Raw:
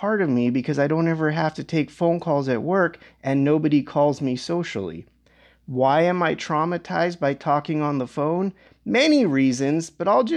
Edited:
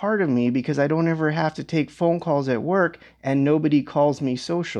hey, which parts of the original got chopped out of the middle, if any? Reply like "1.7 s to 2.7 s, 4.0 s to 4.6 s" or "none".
none